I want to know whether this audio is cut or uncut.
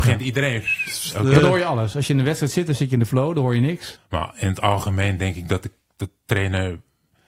cut